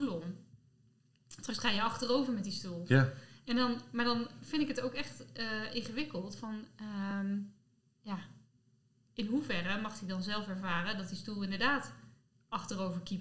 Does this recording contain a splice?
no; 0 cuts

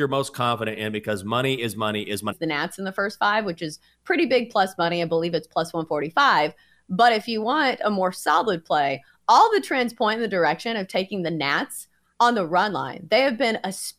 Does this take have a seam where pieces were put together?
yes; 1 cut; at 2.3 s

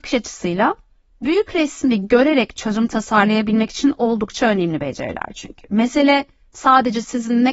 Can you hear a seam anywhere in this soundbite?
no; 0 cuts

